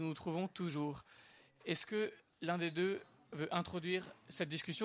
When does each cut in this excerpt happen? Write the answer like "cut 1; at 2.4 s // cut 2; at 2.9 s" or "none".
none